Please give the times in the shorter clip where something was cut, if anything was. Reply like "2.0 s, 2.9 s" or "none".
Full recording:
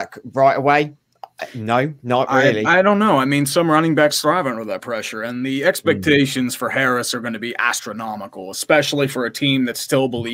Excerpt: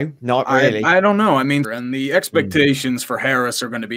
1.6 s